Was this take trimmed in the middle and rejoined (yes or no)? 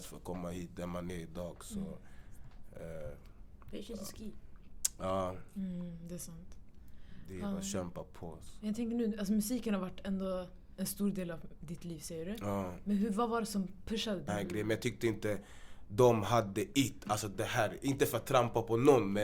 yes